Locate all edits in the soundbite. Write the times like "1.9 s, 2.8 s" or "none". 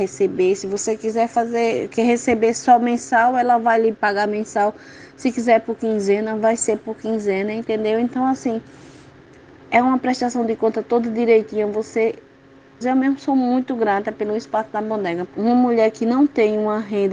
12.8 s, 15.3 s